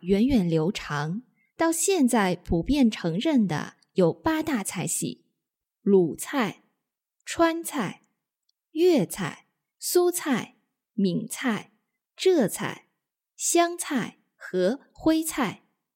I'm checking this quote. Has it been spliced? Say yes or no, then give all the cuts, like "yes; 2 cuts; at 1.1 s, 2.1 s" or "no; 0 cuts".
no; 0 cuts